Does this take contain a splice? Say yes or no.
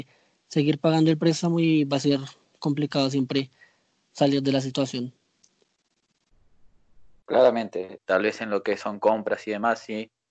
yes